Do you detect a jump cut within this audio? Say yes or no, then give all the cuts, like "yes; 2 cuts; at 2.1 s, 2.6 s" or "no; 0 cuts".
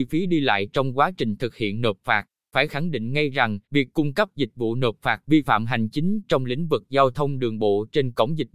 yes; 2 cuts; at 2.5 s, 3.6 s